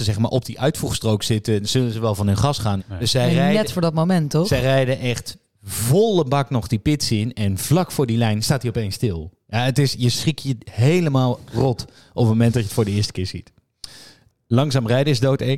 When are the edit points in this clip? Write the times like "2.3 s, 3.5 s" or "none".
2.8 s